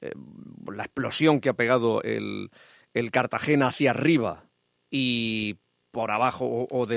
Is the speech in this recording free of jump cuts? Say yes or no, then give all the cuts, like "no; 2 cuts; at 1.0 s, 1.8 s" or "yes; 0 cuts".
yes; 0 cuts